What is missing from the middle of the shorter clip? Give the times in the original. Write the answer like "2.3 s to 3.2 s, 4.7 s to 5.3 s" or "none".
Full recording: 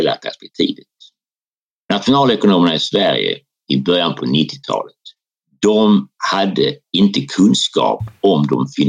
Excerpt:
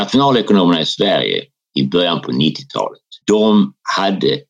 5.2 s to 5.6 s